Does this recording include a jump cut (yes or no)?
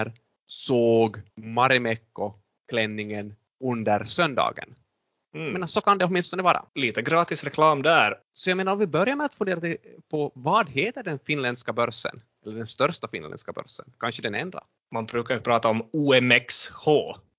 yes